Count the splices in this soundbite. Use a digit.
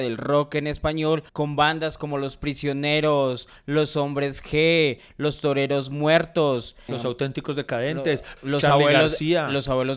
3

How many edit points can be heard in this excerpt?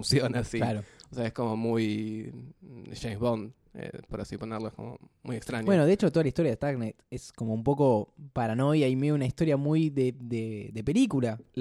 0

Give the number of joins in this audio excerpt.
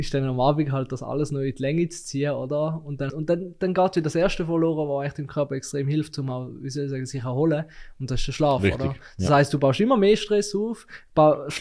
1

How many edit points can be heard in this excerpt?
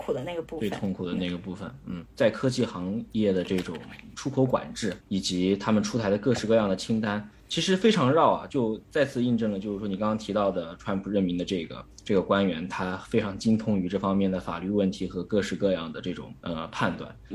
0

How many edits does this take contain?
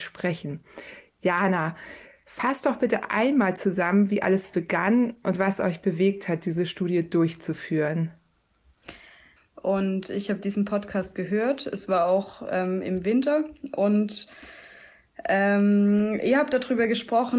1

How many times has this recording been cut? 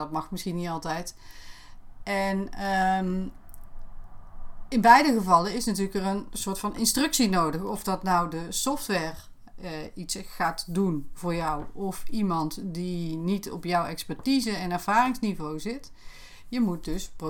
0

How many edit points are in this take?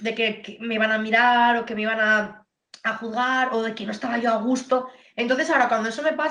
0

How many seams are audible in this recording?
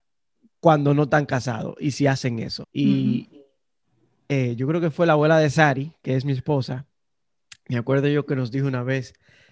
1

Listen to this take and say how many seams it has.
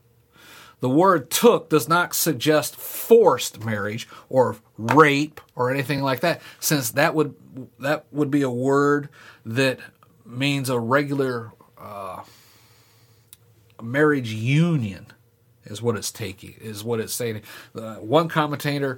0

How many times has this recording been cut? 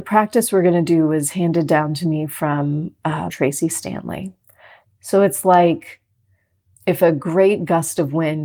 2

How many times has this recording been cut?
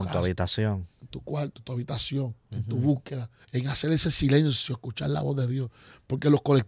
1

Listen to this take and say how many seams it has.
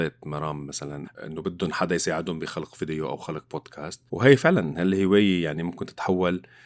2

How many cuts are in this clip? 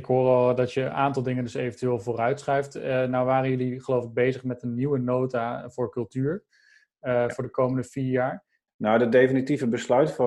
1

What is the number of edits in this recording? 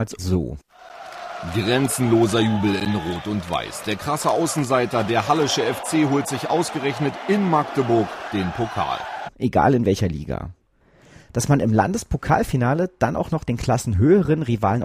1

